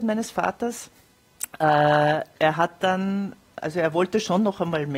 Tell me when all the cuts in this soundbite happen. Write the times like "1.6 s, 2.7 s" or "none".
none